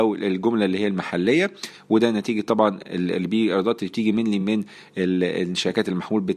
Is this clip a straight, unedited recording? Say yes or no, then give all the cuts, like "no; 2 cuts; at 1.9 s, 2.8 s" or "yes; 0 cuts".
yes; 0 cuts